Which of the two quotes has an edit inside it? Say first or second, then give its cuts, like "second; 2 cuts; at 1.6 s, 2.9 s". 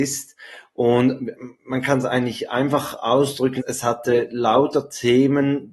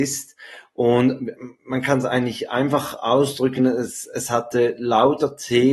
first; 1 cut; at 3.6 s